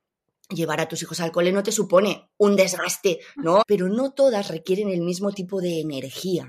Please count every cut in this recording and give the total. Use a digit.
1